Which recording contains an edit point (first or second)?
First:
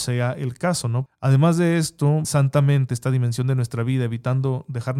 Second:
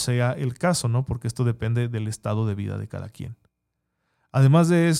first